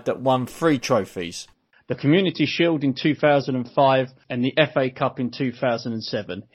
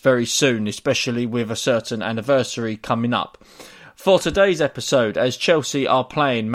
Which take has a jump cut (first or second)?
first